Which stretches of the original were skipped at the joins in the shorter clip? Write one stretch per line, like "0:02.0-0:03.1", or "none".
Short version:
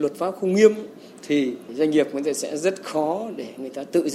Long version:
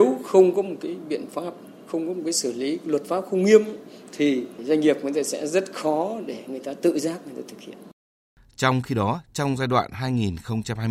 none